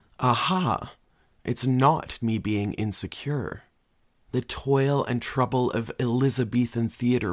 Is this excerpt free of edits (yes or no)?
no